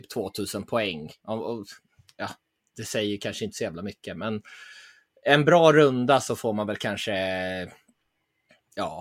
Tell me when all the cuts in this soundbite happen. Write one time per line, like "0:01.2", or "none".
none